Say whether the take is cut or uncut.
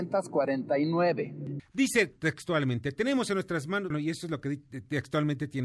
cut